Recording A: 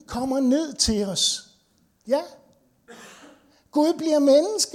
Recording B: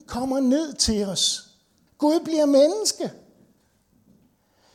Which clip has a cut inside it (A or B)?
B